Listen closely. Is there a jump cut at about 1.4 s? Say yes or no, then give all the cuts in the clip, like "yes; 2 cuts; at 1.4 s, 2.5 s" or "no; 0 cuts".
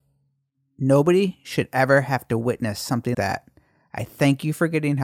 no; 1 cut; at 3.1 s